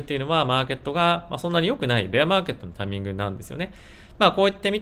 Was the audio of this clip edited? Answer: no; 0 cuts

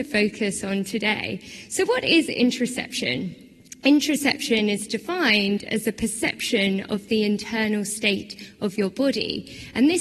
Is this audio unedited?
yes; 0 cuts

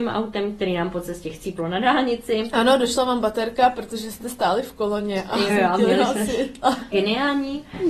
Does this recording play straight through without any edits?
no; 2 cuts; at 5.5 s, 6.9 s

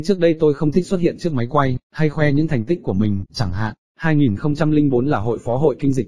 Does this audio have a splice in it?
no; 0 cuts

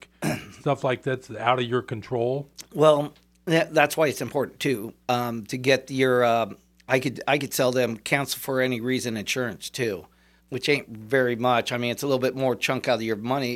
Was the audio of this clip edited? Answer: yes; 1 cut; at 10.4 s

